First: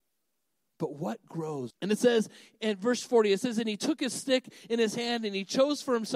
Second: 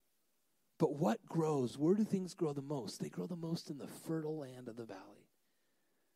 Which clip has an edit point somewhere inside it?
first; 1 cut; at 1.7 s

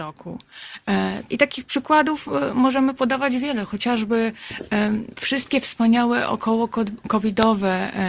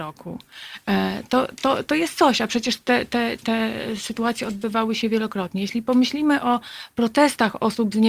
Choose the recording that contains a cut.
first; 1 cut; at 1.3 s

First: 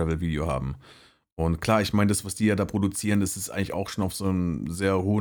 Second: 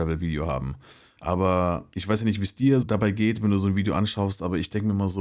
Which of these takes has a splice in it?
second; 2 cuts; at 1.2 s, 2.8 s

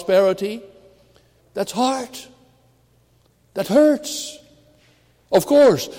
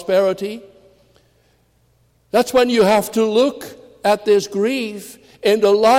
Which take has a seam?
first; 1 cut; at 1.4 s

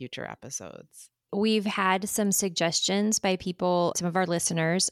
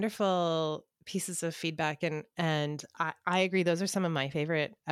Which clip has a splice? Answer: first; 2 cuts; at 1.3 s, 3.9 s

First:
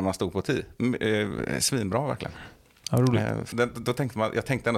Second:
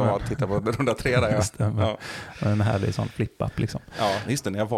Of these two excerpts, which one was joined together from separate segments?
first; 1 cut; at 3.5 s

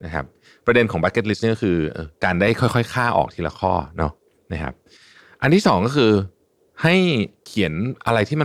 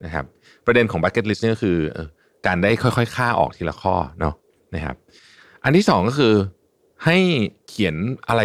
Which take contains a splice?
first; 1 cut; at 2.2 s

